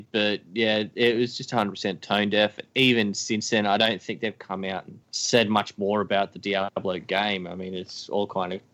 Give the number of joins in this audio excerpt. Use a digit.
1